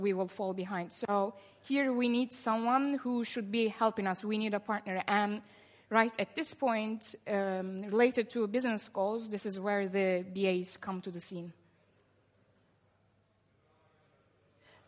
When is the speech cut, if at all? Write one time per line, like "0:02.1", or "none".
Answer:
none